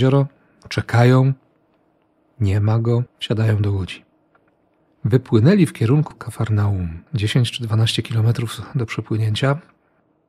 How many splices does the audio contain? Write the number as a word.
two